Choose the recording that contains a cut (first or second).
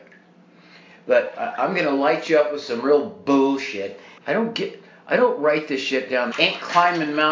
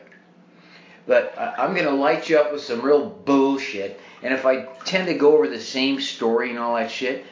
first